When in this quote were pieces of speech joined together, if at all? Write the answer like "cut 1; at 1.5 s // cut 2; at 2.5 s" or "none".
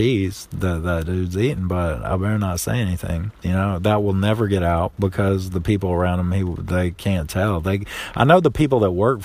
cut 1; at 3.4 s